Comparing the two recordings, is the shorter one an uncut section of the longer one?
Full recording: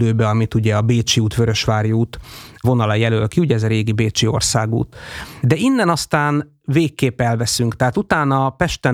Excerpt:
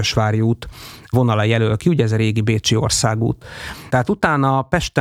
no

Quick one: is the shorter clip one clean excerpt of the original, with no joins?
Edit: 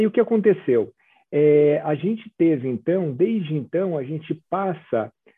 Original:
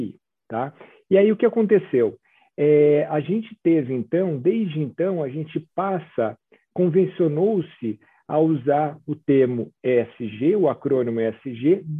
yes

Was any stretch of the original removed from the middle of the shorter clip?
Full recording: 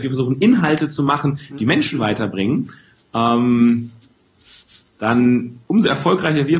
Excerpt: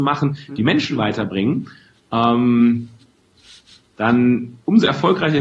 no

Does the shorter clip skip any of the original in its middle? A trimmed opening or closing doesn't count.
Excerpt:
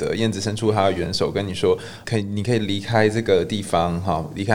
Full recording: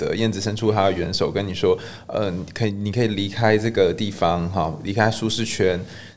yes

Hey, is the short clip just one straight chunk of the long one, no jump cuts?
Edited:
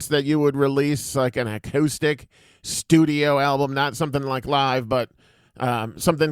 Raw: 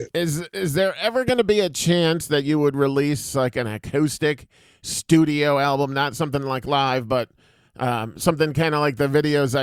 yes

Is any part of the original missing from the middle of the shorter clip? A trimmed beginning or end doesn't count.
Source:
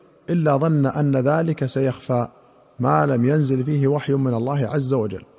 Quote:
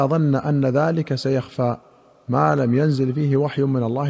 no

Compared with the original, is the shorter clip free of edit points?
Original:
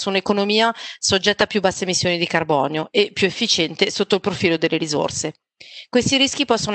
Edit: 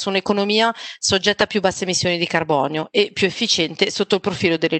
yes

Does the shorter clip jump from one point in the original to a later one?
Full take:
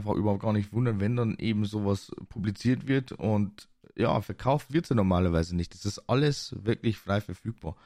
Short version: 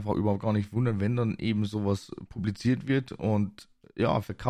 no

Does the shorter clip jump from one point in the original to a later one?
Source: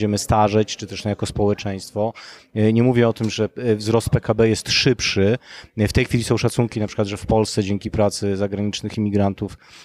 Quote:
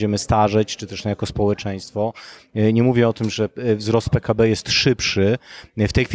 no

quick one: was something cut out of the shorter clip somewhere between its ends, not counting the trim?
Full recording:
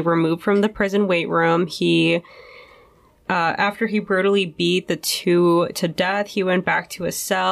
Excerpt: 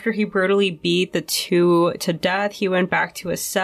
no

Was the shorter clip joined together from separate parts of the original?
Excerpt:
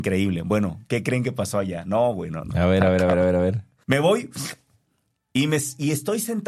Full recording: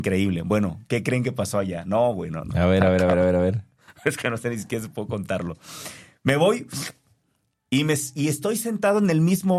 yes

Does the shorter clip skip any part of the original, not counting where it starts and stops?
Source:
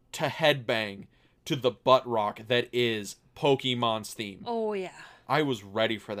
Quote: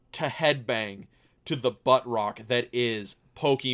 no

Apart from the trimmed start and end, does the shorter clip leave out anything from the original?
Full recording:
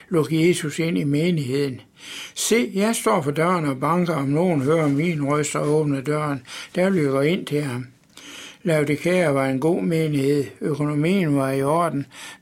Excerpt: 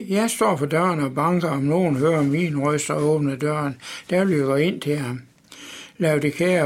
no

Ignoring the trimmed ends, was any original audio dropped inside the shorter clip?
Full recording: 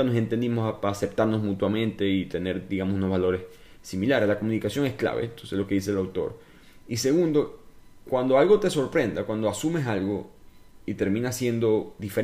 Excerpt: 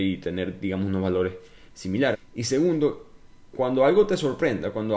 yes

